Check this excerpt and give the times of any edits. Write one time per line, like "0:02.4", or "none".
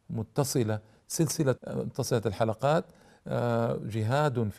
0:01.6